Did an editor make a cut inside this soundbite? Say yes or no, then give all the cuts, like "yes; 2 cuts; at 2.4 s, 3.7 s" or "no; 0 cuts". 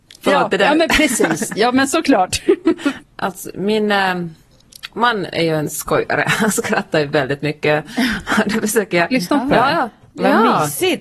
yes; 2 cuts; at 3.0 s, 9.1 s